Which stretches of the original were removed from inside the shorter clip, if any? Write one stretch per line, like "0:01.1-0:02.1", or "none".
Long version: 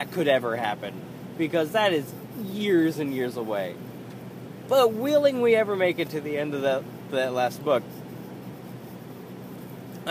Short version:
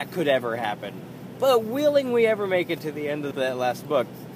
0:01.3-0:04.6
0:06.6-0:07.1

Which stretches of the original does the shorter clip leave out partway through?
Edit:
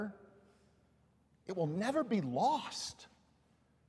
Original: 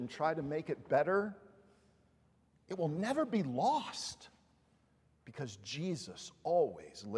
none

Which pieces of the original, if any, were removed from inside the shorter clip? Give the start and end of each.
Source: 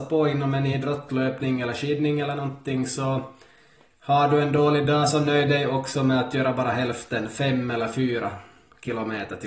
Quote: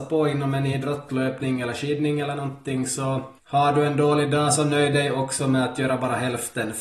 0:03.4-0:03.9

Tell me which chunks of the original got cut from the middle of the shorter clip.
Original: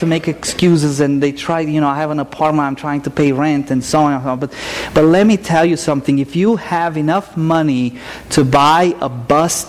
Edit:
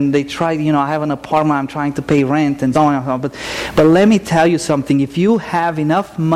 0:03.8-0:03.9

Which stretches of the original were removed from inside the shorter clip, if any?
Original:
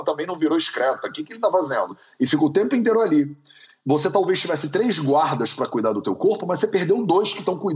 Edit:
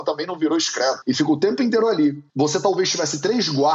0:01.0-0:02.1
0:03.4-0:03.8

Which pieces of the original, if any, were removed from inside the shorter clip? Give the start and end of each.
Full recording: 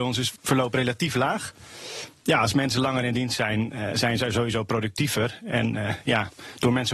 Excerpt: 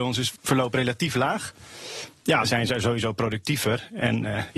0:02.4-0:03.9

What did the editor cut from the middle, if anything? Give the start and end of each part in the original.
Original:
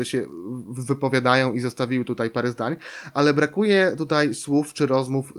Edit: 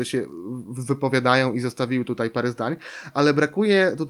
none

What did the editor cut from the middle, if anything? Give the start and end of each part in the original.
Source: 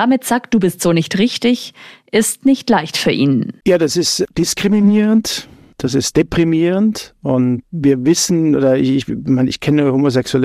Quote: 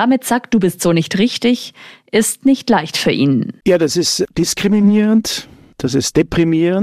none

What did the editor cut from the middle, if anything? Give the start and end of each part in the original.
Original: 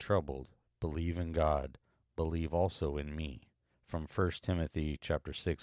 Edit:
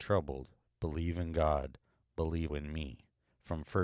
0:02.5-0:02.9

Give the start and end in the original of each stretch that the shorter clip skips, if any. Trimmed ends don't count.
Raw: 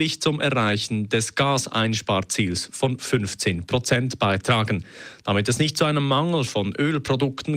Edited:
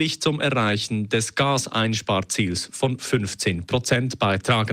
none

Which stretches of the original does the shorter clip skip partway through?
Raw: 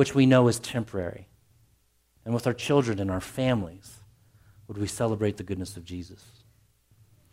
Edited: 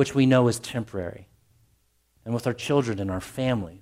none

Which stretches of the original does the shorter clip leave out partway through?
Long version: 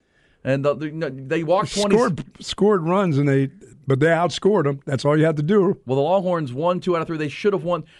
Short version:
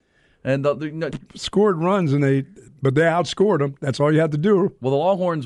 0:01.1-0:02.2

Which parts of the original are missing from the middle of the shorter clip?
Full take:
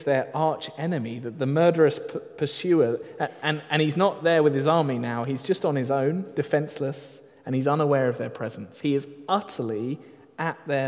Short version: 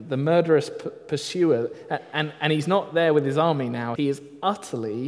0:05.2-0:08.8

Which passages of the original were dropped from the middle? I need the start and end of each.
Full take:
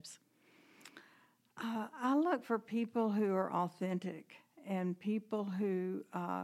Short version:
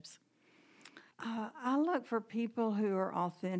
0:01.1-0:01.5

